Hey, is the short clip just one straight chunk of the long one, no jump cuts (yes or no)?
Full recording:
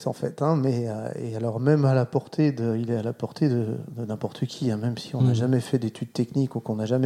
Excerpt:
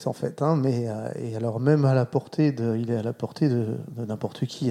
yes